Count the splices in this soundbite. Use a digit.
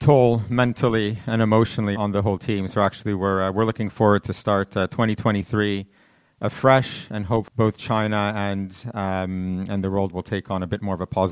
1